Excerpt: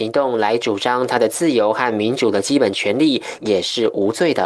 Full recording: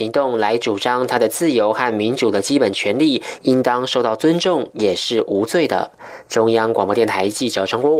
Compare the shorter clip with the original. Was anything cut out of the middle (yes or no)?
yes